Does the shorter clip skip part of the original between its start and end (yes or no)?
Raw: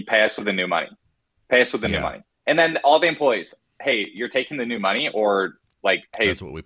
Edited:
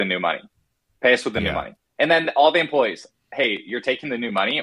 no